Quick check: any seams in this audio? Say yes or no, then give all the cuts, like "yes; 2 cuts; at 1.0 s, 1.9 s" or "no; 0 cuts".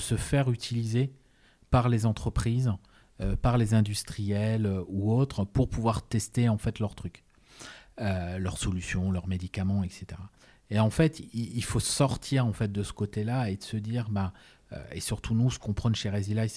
no; 0 cuts